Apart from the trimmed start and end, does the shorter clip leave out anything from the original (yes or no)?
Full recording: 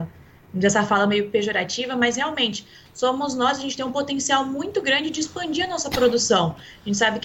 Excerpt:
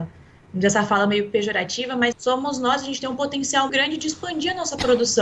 yes